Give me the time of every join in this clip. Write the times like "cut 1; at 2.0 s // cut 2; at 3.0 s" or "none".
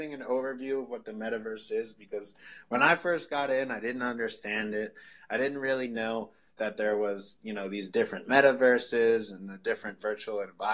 none